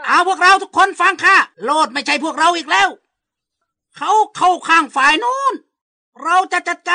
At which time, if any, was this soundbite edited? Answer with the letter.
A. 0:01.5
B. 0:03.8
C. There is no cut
A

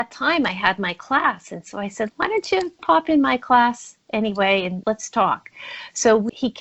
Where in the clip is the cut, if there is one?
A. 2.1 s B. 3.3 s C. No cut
A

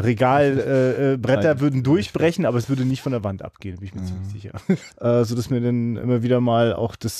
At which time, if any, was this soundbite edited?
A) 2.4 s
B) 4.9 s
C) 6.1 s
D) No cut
B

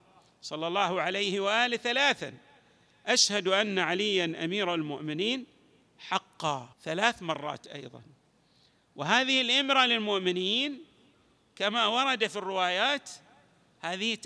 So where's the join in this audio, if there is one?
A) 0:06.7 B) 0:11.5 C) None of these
A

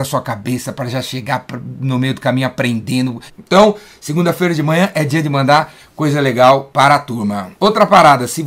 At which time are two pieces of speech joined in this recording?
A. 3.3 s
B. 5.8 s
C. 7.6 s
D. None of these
A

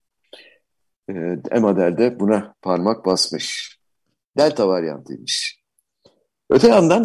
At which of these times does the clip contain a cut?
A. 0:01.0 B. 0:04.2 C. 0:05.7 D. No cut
B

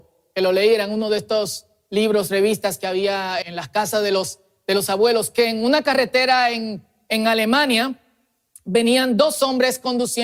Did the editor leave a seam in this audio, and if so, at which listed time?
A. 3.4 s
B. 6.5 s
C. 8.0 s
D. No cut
A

